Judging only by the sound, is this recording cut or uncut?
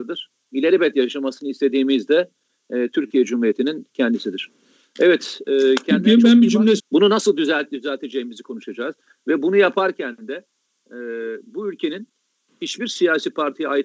cut